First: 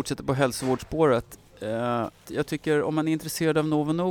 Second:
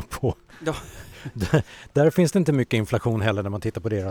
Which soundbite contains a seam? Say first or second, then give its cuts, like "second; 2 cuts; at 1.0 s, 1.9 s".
first; 1 cut; at 2.2 s